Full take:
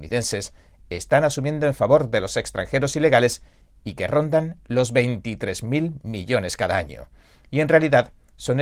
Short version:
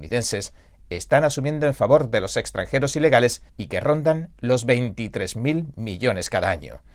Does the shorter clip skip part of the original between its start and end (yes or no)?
yes